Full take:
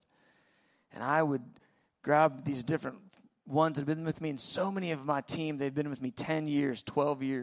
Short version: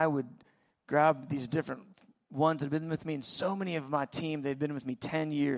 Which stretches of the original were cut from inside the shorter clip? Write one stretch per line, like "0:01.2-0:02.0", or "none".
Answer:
none